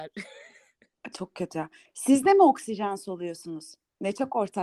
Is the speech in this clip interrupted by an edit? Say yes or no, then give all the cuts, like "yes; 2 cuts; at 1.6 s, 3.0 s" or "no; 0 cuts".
no; 0 cuts